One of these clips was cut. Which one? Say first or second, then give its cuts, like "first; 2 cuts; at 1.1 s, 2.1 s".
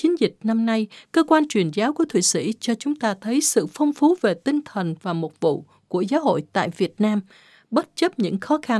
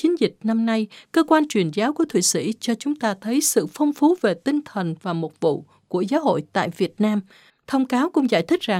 second; 1 cut; at 7.5 s